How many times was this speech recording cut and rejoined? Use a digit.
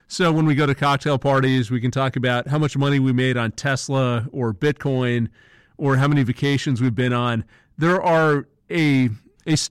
0